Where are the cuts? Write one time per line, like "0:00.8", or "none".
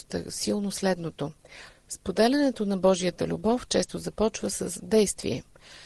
0:01.7